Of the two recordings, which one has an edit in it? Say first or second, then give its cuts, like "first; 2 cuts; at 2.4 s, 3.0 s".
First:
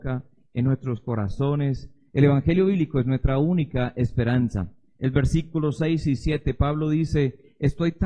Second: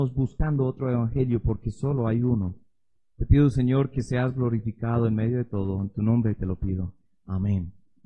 first; 1 cut; at 2.1 s